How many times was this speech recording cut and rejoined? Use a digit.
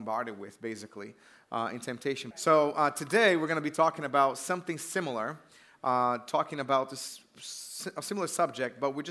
1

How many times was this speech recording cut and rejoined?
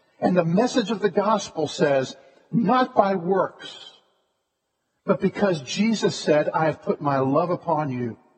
1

